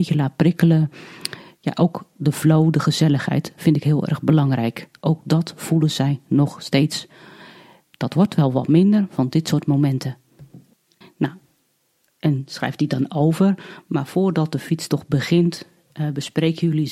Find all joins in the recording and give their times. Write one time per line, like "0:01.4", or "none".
0:09.1
0:11.0